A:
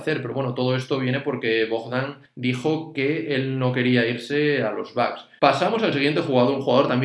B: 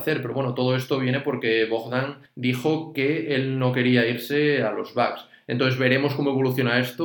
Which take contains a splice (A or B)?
A